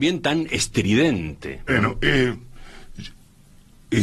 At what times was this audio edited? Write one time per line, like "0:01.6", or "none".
0:01.7

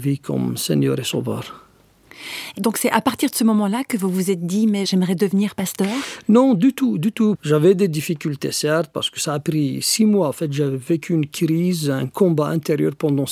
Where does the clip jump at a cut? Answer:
0:07.4

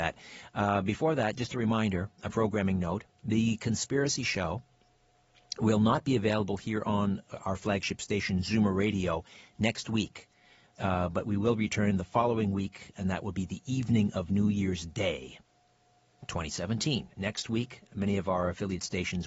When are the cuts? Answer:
0:10.7

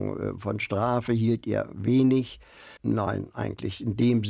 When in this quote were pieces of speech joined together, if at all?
0:02.8

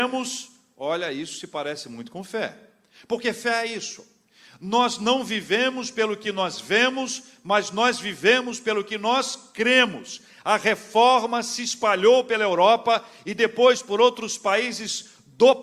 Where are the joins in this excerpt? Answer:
none

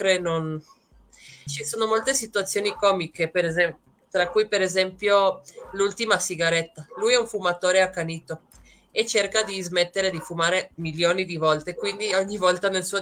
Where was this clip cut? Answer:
0:01.5
0:10.7

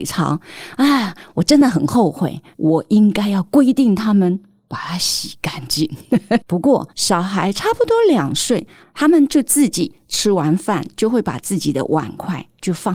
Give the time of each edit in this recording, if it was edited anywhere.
0:06.4
0:08.8

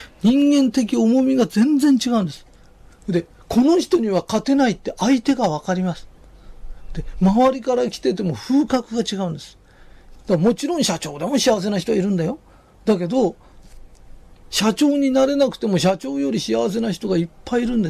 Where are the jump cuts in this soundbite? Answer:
0:10.2

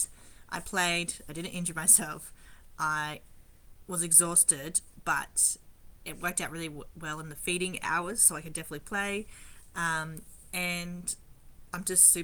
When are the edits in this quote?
none

